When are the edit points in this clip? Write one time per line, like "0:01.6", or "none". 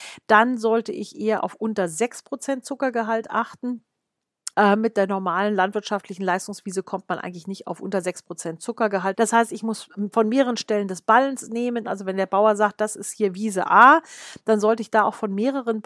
0:04.5
0:09.1
0:11.8